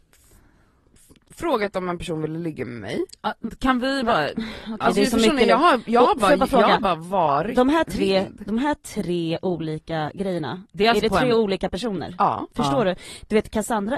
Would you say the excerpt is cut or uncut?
uncut